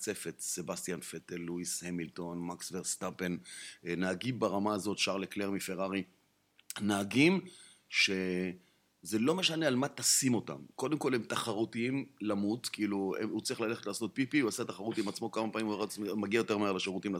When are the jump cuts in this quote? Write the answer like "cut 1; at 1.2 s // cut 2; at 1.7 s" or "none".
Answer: none